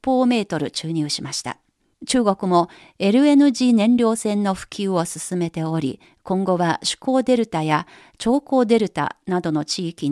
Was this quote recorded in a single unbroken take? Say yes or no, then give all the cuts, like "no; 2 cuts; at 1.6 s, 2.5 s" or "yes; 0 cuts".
no; 1 cut; at 1.9 s